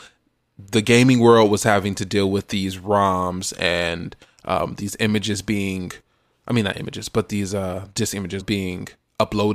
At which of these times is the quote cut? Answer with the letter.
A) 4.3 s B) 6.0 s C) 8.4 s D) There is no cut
C